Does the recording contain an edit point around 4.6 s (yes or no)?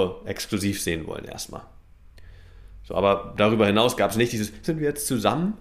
yes